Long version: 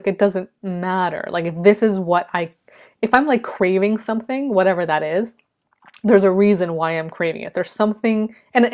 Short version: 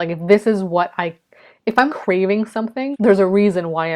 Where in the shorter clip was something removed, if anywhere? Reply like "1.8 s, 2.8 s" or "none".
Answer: 1.9 s, 2.9 s